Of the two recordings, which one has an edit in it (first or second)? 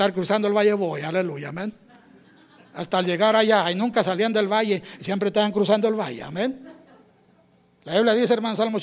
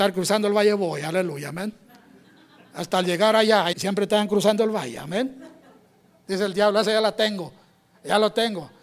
second